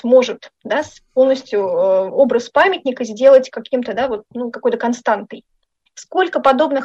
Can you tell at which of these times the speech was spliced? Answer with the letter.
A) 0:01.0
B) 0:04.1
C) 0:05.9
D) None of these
C